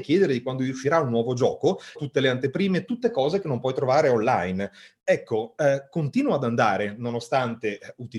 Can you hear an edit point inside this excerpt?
yes; 2 cuts; at 1.9 s, 5.0 s

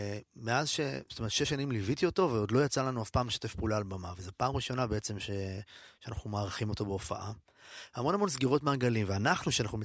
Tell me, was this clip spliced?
no; 0 cuts

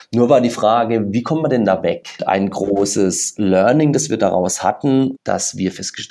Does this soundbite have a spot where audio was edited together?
yes; 2 cuts; at 2.2 s, 5.1 s

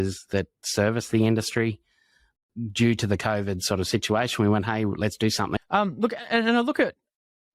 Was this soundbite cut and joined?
yes; 1 cut; at 5.6 s

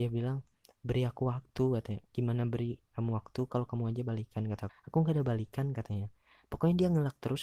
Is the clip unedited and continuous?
no; 1 cut; at 4.7 s

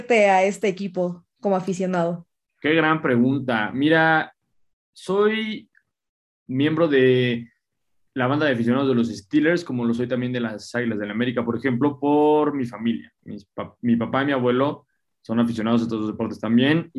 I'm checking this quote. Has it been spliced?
no; 0 cuts

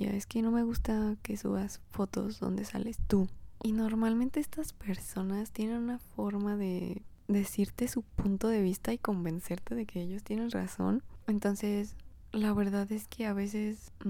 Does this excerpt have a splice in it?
yes; 2 cuts; at 3.6 s, 11.2 s

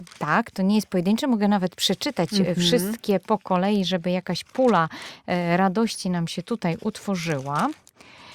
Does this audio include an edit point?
no; 0 cuts

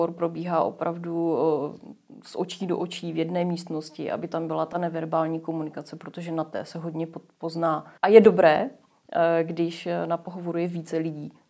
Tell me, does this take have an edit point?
yes; 1 cut; at 8.0 s

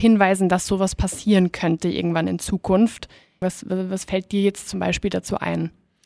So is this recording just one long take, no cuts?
no; 1 cut; at 3.4 s

